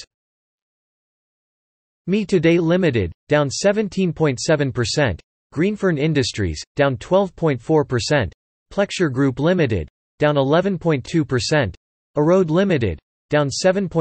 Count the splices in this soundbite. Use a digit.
0